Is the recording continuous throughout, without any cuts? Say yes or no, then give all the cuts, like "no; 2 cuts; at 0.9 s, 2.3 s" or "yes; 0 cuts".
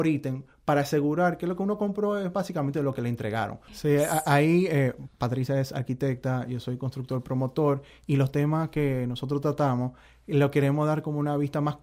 no; 2 cuts; at 3.7 s, 5.1 s